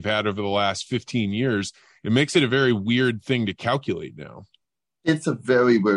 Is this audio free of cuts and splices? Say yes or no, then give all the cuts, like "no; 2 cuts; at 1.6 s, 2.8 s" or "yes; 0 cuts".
yes; 0 cuts